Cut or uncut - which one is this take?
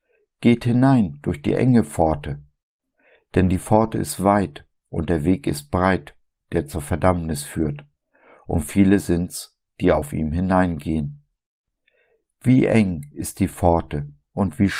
uncut